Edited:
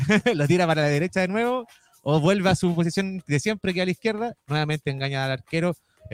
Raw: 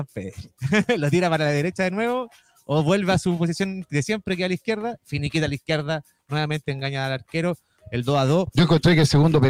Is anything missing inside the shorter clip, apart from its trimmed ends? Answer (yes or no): yes